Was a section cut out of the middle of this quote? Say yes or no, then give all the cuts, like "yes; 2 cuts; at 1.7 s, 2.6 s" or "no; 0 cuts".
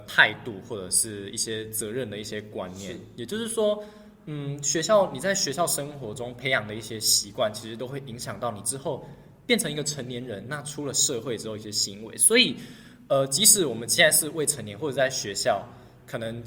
no; 0 cuts